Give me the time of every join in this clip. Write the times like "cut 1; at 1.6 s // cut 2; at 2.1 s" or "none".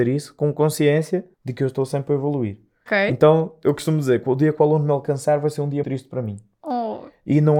cut 1; at 1.3 s // cut 2; at 2.9 s // cut 3; at 5.8 s

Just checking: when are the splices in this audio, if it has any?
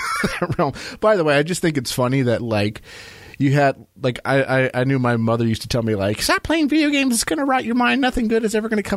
none

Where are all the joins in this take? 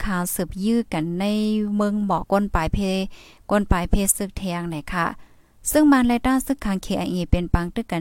cut 1; at 2.2 s

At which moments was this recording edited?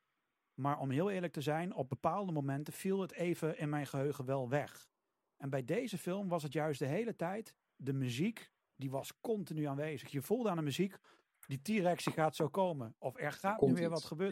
cut 1; at 11.3 s

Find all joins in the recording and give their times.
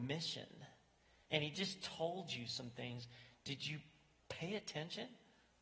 none

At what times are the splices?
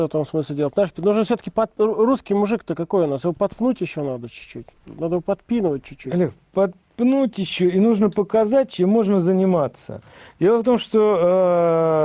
none

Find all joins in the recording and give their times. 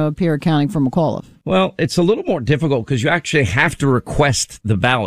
cut 1; at 1.4 s

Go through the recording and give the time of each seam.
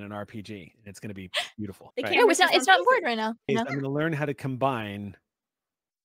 cut 1; at 1.9 s // cut 2; at 3.5 s

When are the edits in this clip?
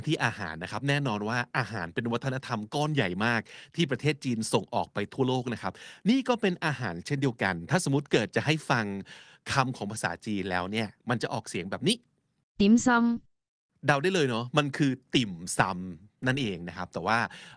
none

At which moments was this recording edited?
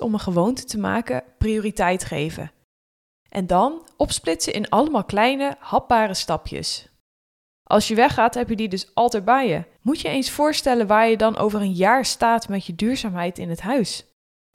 cut 1; at 7.5 s // cut 2; at 9.8 s

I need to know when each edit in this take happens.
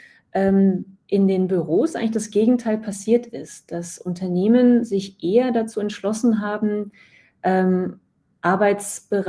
none

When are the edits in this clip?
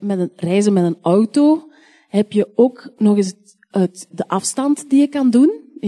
cut 1; at 4.1 s

